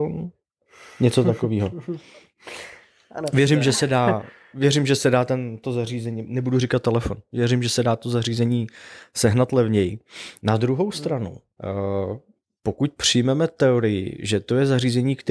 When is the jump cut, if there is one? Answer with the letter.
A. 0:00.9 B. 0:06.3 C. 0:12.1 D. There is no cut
D